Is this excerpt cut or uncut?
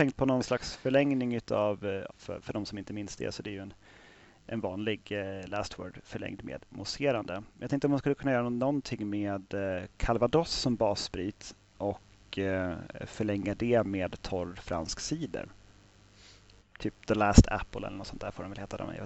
cut